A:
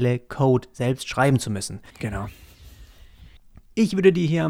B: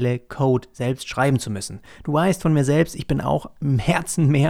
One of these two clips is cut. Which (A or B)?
A